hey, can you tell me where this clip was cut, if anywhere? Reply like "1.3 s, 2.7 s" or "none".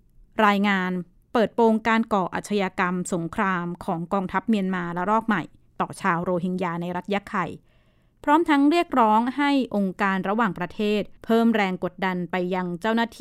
11.2 s